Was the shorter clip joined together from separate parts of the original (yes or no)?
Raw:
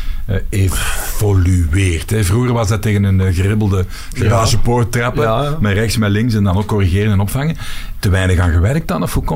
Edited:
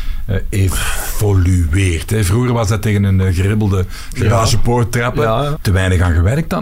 yes